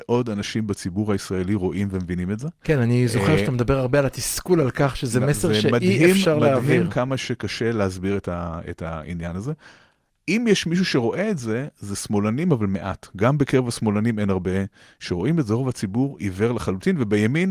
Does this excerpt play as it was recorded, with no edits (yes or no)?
yes